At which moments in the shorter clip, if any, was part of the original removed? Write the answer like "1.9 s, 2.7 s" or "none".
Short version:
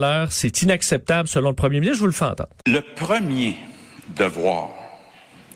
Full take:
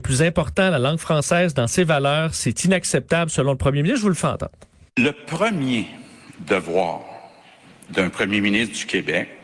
2.6 s

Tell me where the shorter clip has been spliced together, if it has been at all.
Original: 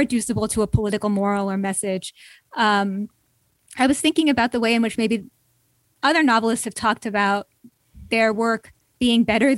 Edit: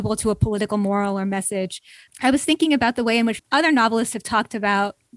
2.1 s, 3.4 s

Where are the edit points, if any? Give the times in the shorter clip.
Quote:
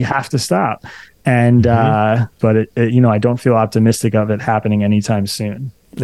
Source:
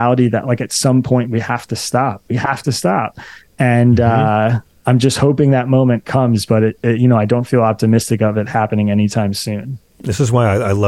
2.4 s

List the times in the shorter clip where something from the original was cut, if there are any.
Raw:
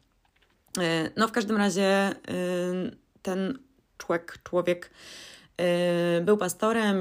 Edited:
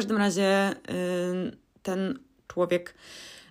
2.5 s

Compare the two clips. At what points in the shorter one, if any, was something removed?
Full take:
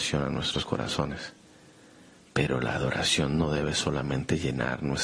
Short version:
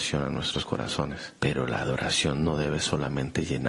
1.4 s

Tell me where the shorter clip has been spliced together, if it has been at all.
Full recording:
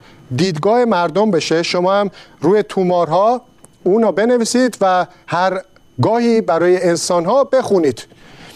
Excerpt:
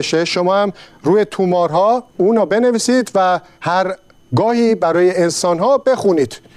2.1 s

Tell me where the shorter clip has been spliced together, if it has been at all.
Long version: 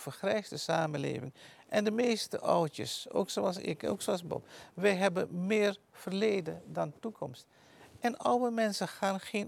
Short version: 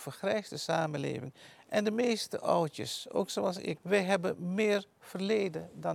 3.8 s

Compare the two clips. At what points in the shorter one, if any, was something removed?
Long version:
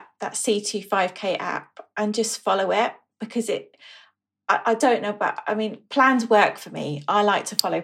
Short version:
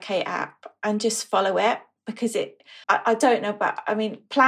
2.8 s

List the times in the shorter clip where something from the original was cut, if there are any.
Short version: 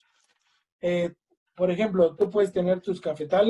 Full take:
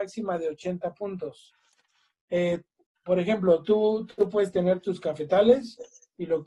2.2 s

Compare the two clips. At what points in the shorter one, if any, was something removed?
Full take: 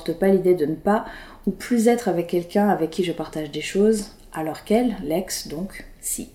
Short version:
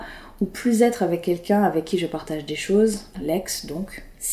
3.1 s

